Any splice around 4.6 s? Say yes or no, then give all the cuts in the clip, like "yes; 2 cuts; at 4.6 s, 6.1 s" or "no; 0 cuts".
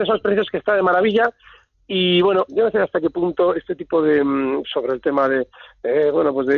yes; 2 cuts; at 2.5 s, 4.6 s